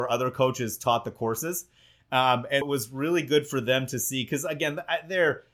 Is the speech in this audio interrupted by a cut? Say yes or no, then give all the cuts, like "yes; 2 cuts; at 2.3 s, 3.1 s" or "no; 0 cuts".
yes; 1 cut; at 2.6 s